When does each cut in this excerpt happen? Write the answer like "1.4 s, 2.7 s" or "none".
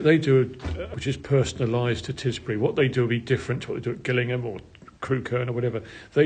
0.9 s

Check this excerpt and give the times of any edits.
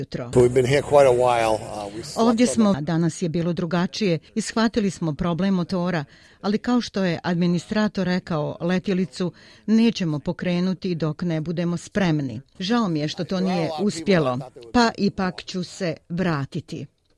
2.7 s, 12.6 s

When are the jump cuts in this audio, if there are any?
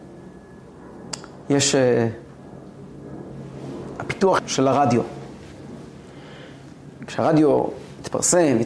4.4 s

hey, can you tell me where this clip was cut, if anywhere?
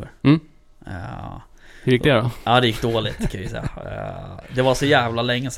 none

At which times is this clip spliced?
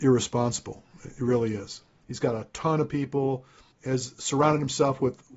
2.0 s, 3.7 s

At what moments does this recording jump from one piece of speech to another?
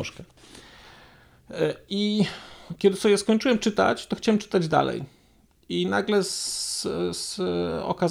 none

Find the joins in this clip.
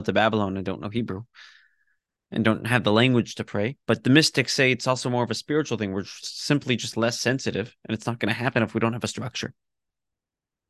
3.8 s

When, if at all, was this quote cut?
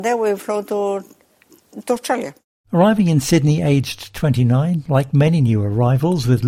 none

